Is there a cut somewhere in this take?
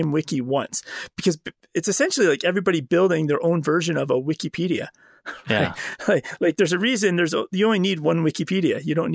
no; 0 cuts

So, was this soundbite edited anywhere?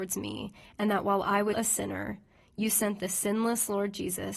yes; 1 cut; at 1.5 s

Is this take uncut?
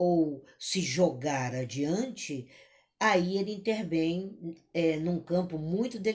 yes; 0 cuts

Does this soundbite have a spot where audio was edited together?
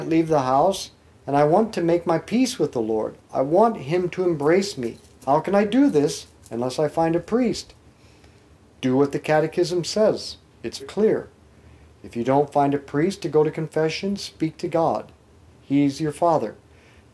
yes; 1 cut; at 10.8 s

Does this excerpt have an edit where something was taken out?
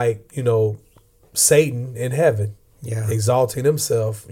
no; 0 cuts

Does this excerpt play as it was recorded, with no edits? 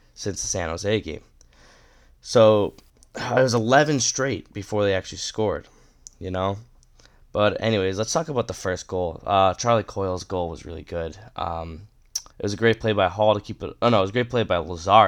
no; 1 cut; at 12.3 s

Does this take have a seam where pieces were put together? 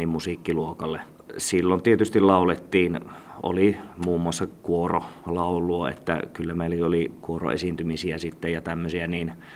no; 0 cuts

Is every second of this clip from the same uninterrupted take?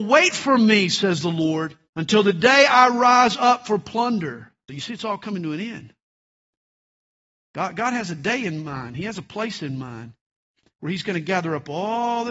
no; 2 cuts; at 1.9 s, 4.7 s

